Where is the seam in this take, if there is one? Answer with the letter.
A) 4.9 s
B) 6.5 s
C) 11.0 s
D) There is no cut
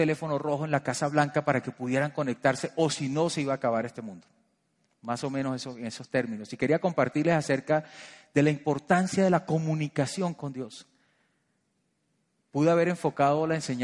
D